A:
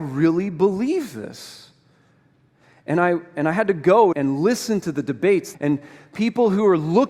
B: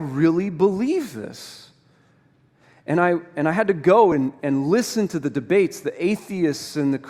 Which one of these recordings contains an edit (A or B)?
A